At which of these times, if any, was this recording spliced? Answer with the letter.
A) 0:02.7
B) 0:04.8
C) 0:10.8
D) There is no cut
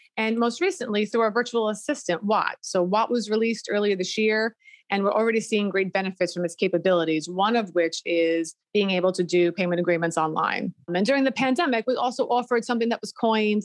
C